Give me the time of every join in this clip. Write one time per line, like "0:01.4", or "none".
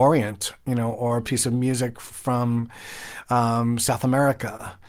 none